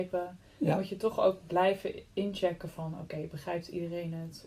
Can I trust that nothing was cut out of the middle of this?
yes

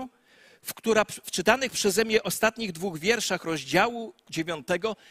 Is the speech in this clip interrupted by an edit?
no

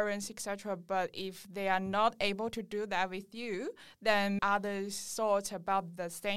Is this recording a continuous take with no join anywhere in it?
no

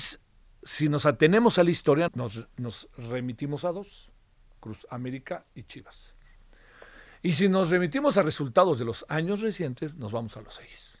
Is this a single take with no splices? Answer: no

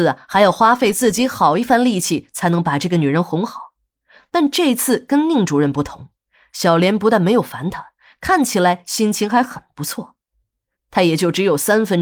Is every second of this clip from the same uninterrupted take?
no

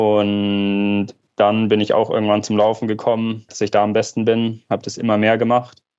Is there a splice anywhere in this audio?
yes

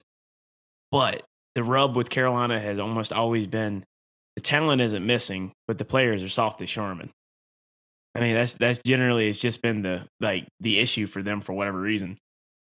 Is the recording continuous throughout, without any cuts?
yes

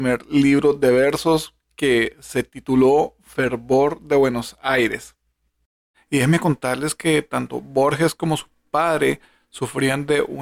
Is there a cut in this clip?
yes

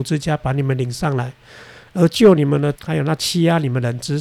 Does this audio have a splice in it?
yes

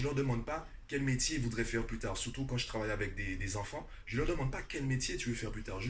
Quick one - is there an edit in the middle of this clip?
no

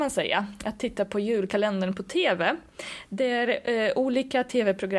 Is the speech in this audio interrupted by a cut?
no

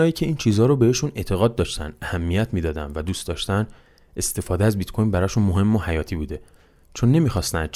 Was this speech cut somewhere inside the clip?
no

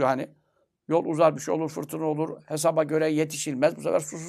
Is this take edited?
no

